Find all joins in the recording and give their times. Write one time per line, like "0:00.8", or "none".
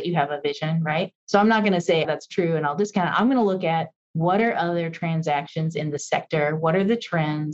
0:02.0

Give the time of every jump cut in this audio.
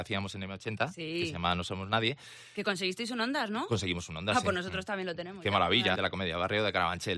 0:06.0

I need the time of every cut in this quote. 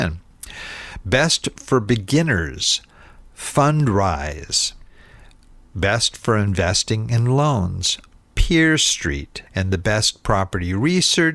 0:09.5

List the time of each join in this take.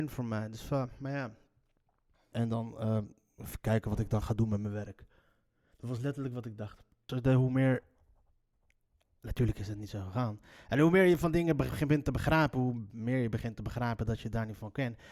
0:02.3
0:07.1

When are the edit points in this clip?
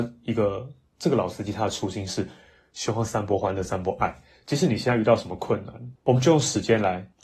none

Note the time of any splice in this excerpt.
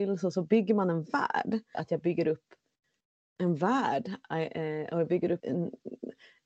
0:01.7
0:05.4

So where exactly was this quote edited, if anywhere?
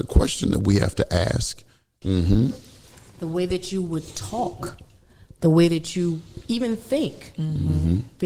0:02.0

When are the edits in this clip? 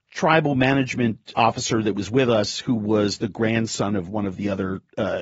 0:01.3

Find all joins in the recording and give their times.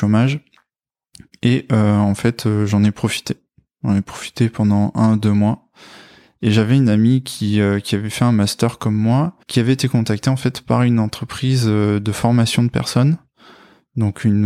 0:09.4

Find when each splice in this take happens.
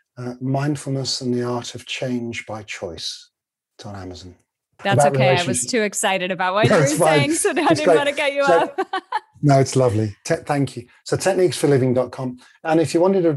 0:04.8

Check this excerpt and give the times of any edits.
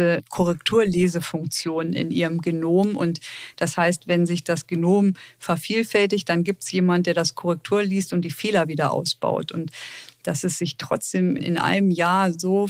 0:11.4

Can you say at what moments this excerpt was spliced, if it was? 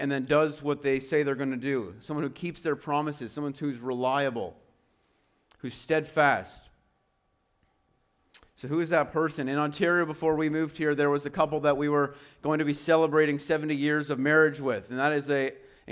none

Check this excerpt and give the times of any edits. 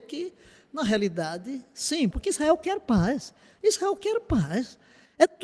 0:02.1

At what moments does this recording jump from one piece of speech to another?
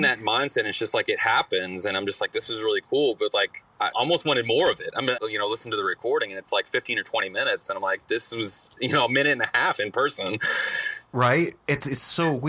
0:03.9
0:05.2

